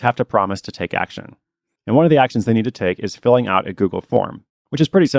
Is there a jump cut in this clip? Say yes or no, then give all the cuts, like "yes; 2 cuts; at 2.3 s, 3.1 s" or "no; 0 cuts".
no; 0 cuts